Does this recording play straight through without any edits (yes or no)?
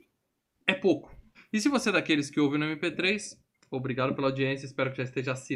no